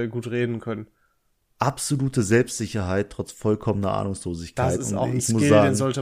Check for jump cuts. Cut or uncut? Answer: uncut